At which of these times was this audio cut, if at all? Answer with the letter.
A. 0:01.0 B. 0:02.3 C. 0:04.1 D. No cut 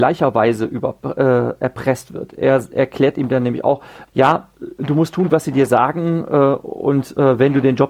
C